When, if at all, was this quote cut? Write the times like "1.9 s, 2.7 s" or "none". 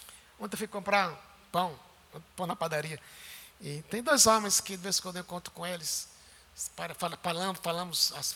none